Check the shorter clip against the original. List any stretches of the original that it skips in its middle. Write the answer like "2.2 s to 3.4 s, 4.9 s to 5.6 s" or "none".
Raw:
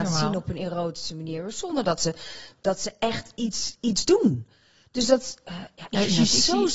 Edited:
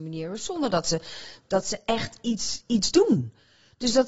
none